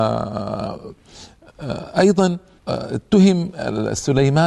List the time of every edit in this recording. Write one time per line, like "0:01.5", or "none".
0:02.6